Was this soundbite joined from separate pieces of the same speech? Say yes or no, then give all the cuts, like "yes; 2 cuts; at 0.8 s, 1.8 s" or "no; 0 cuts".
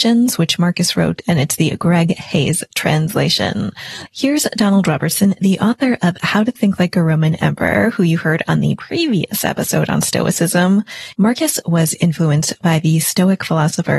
yes; 2 cuts; at 4.1 s, 11.1 s